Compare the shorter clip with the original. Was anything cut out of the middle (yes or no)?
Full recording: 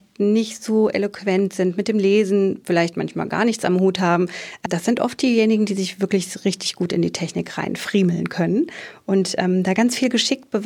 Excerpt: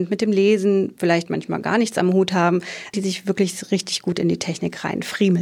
yes